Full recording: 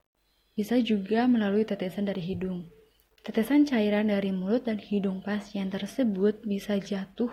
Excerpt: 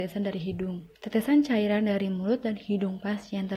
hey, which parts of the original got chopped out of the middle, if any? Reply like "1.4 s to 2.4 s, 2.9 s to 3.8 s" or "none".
2.8 s to 3.2 s